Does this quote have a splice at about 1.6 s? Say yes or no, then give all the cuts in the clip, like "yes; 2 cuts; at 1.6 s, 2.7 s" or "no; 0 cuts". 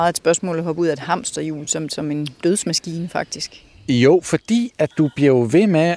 no; 0 cuts